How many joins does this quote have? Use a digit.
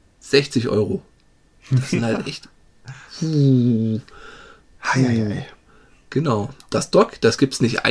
0